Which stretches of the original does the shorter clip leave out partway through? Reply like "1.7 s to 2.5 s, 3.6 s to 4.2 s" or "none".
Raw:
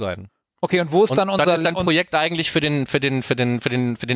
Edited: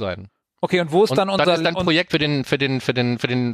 2.1 s to 2.5 s